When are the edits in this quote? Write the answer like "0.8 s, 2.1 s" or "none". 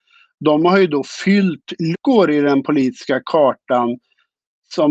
1.9 s